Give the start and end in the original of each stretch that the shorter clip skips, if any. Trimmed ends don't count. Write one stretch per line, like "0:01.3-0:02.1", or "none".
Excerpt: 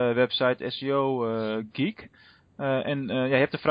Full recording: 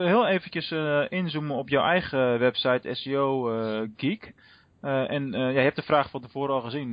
none